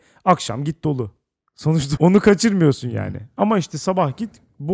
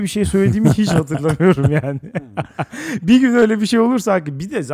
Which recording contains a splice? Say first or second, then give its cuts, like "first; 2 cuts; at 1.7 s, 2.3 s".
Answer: first; 1 cut; at 2.0 s